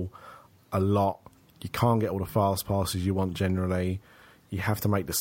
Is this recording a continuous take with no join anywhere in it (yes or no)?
yes